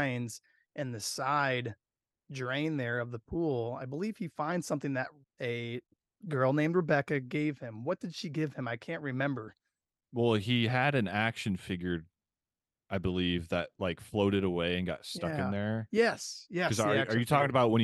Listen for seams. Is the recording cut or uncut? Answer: uncut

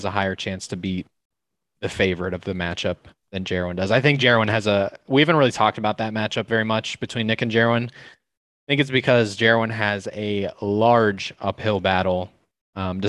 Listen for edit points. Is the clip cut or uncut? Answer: uncut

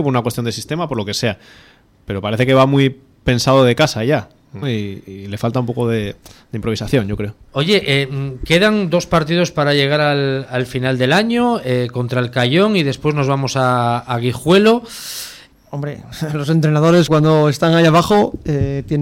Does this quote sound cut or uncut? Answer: cut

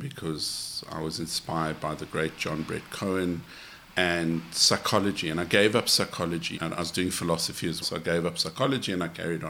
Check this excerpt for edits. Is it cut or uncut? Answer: cut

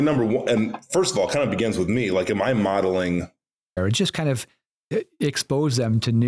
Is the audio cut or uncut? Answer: cut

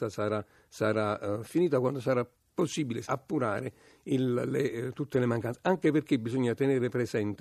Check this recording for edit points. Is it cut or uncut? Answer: cut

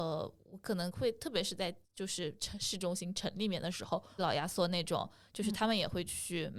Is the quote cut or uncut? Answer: cut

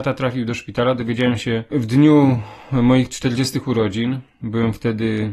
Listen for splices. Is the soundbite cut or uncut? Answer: uncut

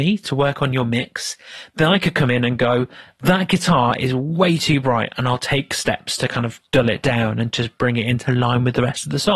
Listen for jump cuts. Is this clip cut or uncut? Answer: uncut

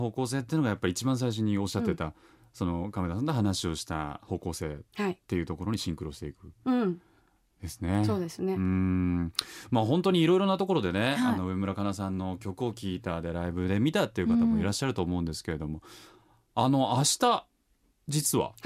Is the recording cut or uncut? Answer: uncut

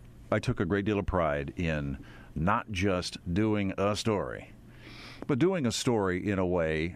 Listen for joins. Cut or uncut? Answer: uncut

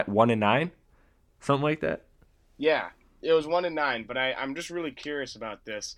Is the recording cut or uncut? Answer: uncut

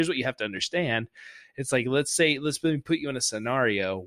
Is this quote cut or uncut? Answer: uncut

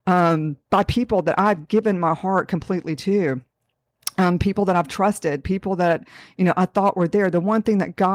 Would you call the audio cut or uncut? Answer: uncut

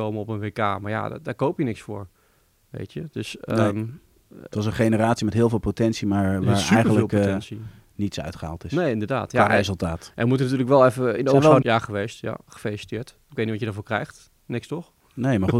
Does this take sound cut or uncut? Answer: cut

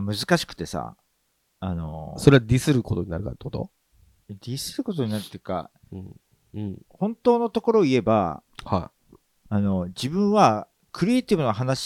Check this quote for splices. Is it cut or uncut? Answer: cut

